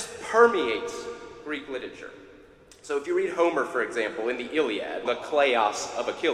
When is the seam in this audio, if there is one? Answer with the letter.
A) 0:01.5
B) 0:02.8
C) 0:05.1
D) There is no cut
C